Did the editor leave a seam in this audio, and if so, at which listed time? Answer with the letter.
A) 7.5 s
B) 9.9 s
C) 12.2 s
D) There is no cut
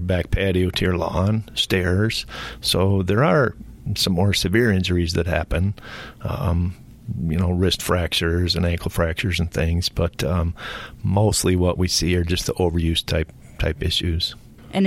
D